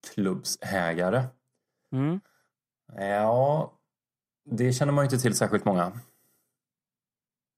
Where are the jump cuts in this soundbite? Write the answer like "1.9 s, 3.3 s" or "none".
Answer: none